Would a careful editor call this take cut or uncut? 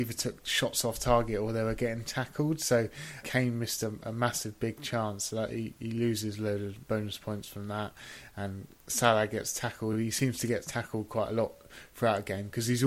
uncut